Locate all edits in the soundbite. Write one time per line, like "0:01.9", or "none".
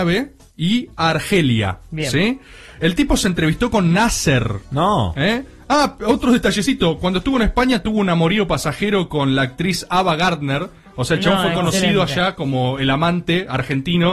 none